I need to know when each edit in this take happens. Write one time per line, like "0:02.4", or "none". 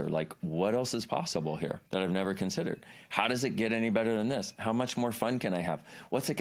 0:01.9